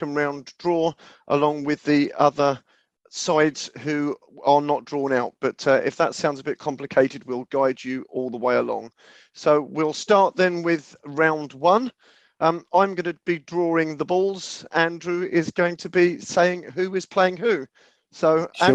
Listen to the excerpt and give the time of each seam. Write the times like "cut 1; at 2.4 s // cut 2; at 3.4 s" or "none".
cut 1; at 14.7 s